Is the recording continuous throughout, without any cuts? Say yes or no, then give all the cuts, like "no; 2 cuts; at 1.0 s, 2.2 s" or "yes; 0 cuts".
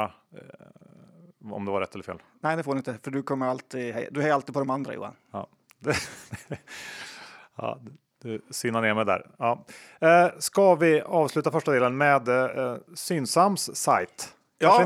yes; 0 cuts